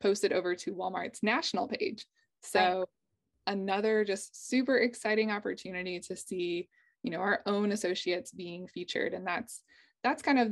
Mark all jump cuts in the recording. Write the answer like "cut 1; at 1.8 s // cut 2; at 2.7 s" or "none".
none